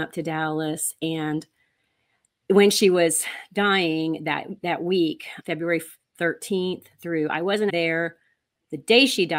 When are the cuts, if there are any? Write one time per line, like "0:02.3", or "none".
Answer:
0:05.4
0:07.7